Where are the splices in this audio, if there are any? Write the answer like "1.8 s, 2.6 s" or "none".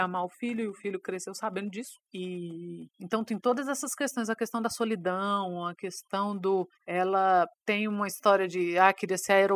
2.1 s

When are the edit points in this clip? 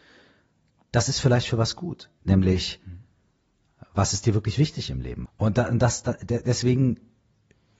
2.2 s, 5.2 s

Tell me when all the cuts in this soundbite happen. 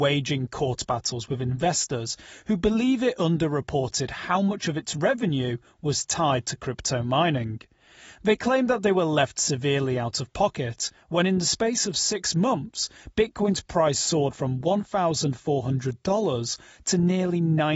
none

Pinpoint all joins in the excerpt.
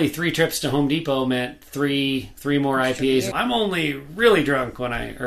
3.3 s

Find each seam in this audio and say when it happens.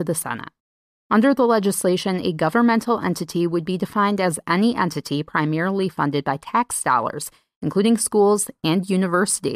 0.9 s

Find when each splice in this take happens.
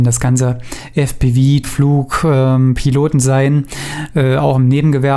1.6 s

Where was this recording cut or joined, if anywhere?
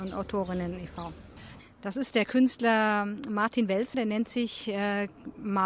1.6 s, 3.9 s

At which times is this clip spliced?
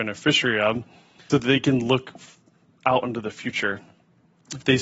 1.3 s

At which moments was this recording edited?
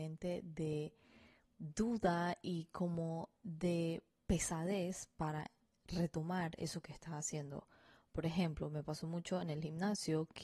none

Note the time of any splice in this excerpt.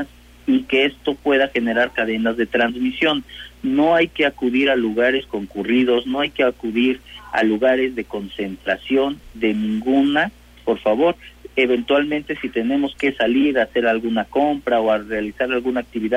none

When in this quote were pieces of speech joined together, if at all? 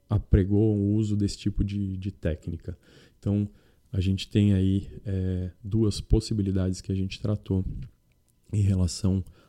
none

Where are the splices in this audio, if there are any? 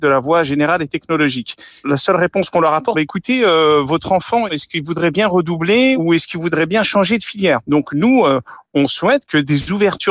2.9 s

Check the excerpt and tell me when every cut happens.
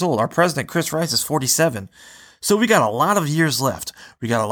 none

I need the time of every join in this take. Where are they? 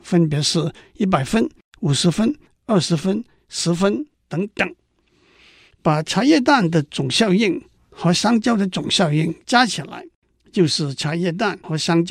none

